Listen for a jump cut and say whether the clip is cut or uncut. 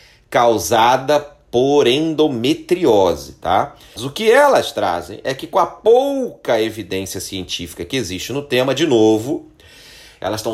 cut